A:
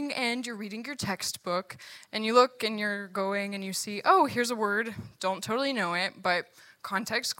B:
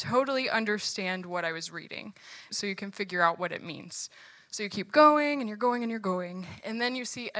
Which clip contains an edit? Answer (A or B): B